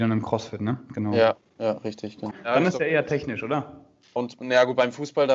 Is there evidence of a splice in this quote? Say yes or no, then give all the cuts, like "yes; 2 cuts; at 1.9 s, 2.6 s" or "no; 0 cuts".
yes; 2 cuts; at 2.3 s, 4.2 s